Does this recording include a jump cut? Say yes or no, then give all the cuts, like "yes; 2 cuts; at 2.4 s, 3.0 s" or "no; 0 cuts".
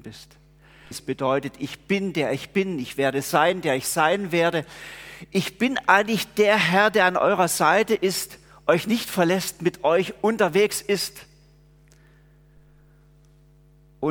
yes; 1 cut; at 0.9 s